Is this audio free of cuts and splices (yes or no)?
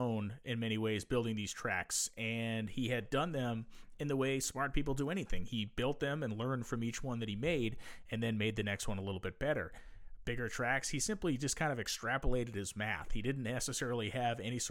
yes